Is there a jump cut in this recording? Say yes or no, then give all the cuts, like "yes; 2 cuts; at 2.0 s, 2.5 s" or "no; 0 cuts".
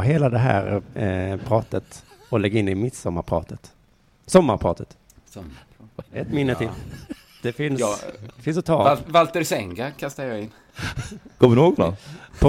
yes; 1 cut; at 6.1 s